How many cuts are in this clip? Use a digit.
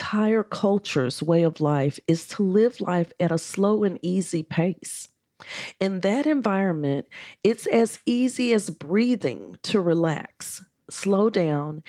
0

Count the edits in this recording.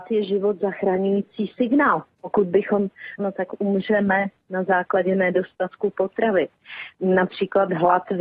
1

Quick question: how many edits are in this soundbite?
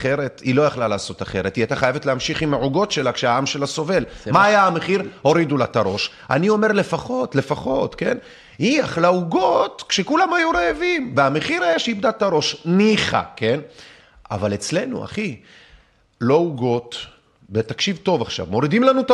0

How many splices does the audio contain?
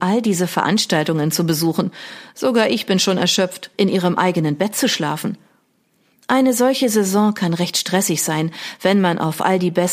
1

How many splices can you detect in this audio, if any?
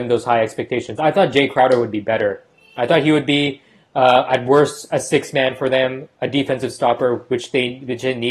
0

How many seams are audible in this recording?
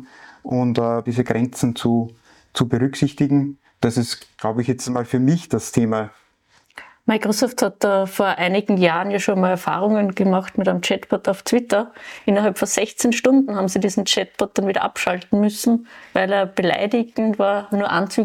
1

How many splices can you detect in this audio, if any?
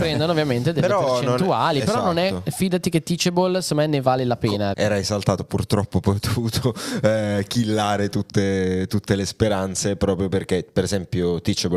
1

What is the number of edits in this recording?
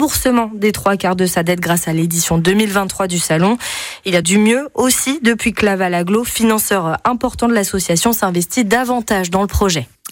1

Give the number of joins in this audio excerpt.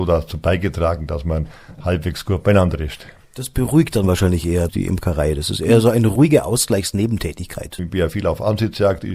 1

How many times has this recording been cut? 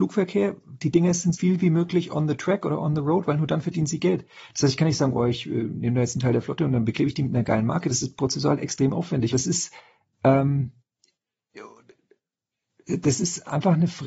2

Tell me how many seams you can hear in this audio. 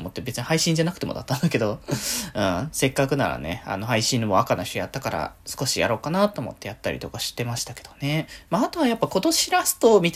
1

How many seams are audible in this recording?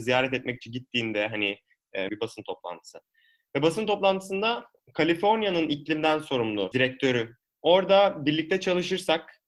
1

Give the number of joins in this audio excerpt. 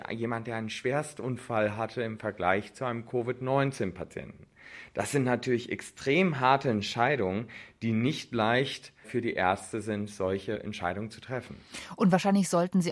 0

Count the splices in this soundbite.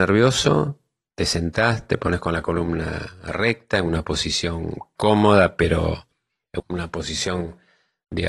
1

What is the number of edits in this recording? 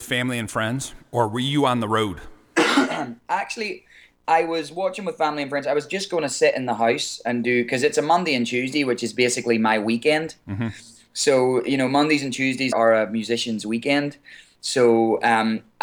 1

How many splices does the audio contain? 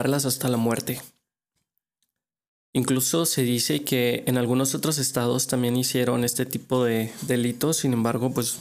0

